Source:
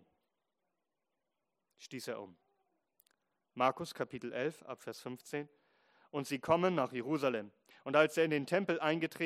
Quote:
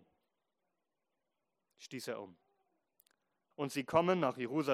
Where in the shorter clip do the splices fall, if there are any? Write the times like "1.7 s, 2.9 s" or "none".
3.5 s